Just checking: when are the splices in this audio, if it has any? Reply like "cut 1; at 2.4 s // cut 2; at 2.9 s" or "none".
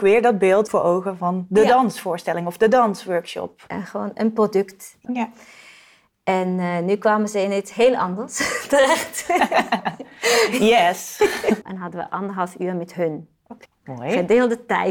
cut 1; at 5.0 s // cut 2; at 11.6 s // cut 3; at 13.7 s

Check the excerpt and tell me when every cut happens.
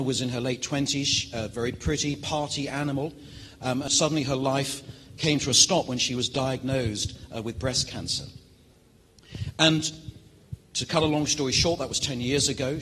cut 1; at 3.9 s

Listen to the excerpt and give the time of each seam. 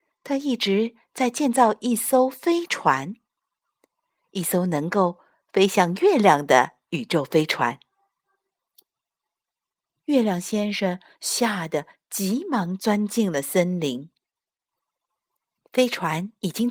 cut 1; at 9.9 s // cut 2; at 15.6 s

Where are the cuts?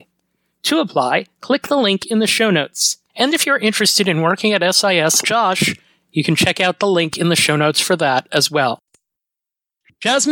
cut 1; at 3.1 s // cut 2; at 5.2 s

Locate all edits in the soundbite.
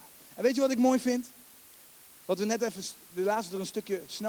cut 1; at 2.2 s

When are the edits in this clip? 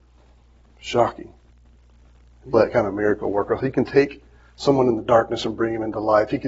cut 1; at 2.5 s

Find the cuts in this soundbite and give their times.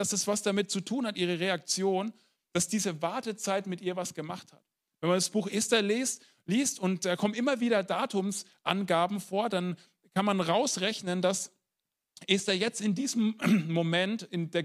none

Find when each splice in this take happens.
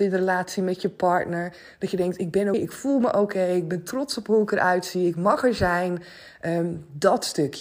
cut 1; at 2.5 s

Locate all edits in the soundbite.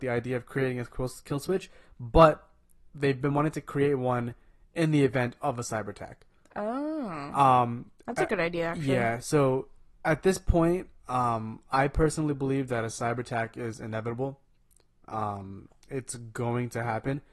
none

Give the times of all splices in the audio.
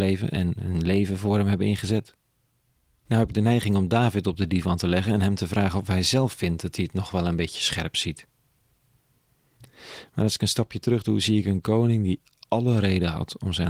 cut 1; at 3.1 s

